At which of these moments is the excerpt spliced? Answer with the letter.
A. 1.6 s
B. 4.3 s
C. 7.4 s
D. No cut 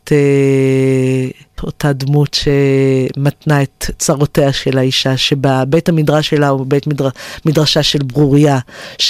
A